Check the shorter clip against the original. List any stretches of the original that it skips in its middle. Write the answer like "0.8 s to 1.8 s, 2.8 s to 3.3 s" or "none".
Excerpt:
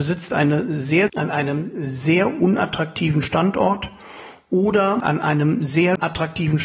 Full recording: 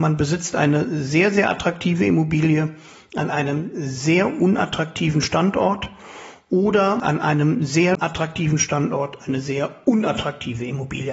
1.3 s to 3.1 s